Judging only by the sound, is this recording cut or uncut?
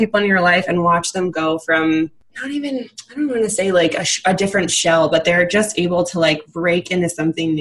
uncut